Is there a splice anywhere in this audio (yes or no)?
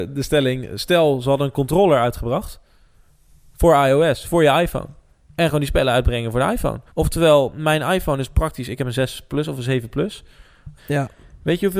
yes